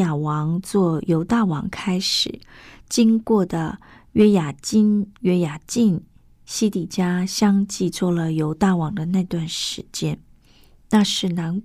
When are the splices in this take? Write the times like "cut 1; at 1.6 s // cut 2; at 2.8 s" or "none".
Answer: none